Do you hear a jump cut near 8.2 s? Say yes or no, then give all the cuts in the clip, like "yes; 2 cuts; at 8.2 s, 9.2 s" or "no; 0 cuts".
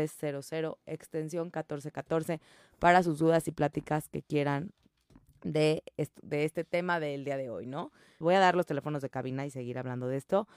yes; 1 cut; at 8.2 s